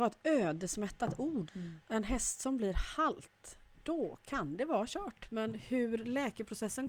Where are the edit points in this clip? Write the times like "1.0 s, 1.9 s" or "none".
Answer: 1.5 s, 5.2 s